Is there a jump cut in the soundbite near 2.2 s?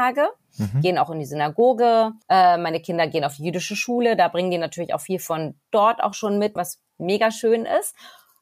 yes; 2 cuts; at 2.2 s, 6.6 s

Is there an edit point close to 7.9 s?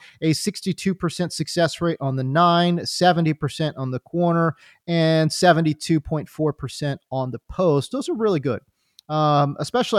yes; 1 cut; at 7.9 s

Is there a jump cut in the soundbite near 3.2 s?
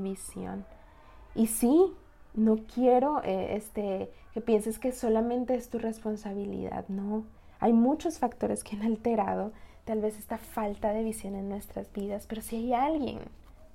no; 0 cuts

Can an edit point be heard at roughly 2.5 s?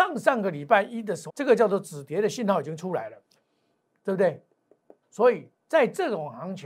no; 2 cuts; at 1.3 s, 5.0 s

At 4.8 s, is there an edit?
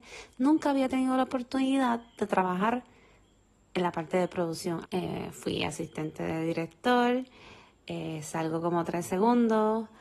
yes; 1 cut; at 4.8 s

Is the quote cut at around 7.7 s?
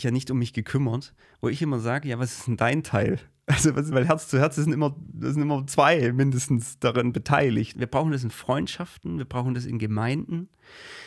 yes; 2 cuts; at 3.9 s, 7.7 s

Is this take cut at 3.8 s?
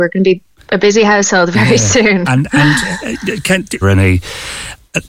yes; 2 cuts; at 2.3 s, 3.8 s

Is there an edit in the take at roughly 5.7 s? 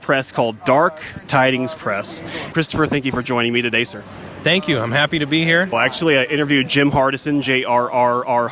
yes; 2 cuts; at 2.5 s, 5.7 s

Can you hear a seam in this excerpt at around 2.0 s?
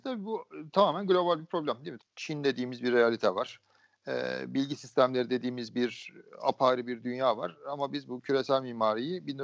yes; 1 cut; at 2.0 s

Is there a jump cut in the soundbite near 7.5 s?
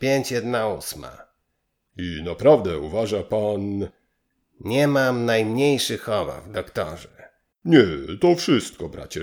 yes; 1 cut; at 7.5 s

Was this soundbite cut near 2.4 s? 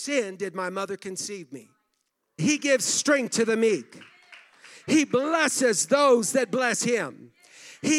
yes; 2 cuts; at 2.4 s, 4.8 s

